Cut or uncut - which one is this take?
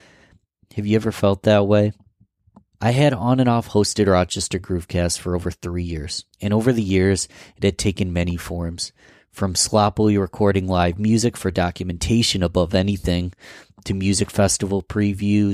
cut